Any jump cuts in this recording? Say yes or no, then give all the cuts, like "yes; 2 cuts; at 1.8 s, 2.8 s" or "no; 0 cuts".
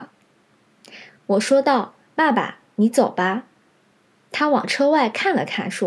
no; 0 cuts